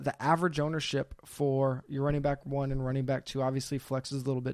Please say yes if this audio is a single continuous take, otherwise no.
yes